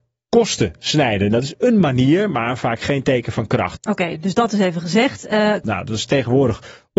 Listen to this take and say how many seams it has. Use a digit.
2